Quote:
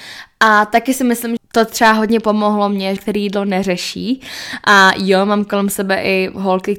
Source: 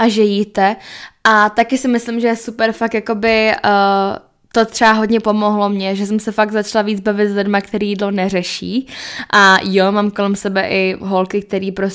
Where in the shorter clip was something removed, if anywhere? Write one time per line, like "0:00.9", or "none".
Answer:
0:01.4
0:03.0